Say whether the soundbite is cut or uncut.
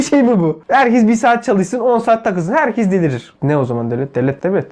cut